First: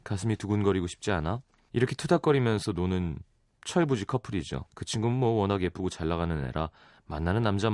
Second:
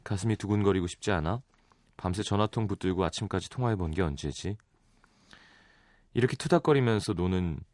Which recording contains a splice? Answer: first; 2 cuts; at 1.7 s, 4.7 s

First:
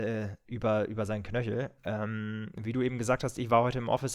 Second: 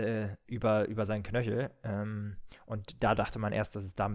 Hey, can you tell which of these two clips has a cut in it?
first; 1 cut; at 1.8 s

